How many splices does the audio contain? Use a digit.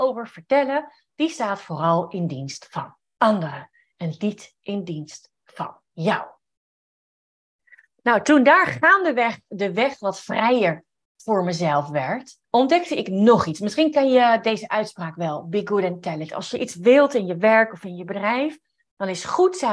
1